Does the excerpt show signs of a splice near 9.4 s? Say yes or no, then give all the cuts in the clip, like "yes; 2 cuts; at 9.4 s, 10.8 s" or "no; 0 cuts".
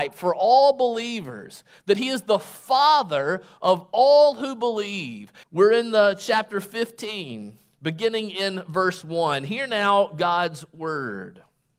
no; 1 cut; at 5.4 s